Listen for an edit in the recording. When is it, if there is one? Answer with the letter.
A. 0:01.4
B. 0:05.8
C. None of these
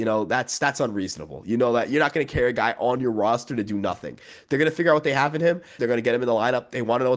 B